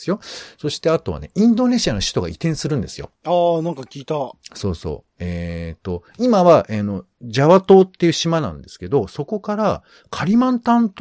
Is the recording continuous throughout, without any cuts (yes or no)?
no